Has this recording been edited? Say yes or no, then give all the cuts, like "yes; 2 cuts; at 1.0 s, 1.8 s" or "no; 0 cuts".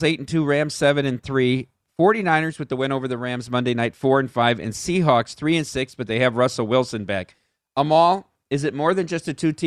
no; 0 cuts